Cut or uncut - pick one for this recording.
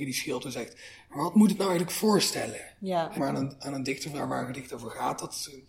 cut